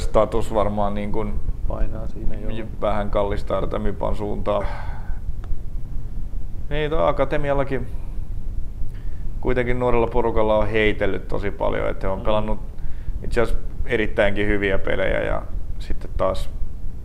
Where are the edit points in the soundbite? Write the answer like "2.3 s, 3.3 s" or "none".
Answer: 4.6 s